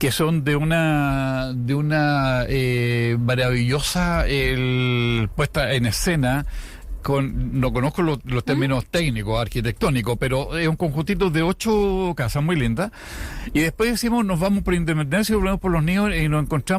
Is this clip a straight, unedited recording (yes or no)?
yes